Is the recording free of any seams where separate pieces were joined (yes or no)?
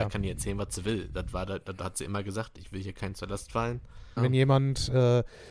no